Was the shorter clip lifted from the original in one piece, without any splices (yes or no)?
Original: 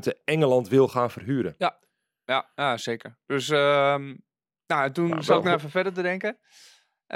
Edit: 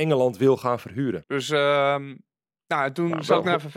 no